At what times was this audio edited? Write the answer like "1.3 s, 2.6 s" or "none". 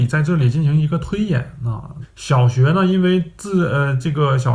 2.0 s